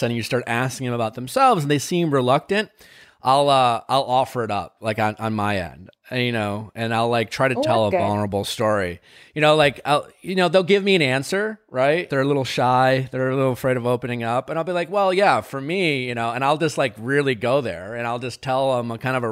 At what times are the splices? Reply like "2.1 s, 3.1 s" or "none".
12.1 s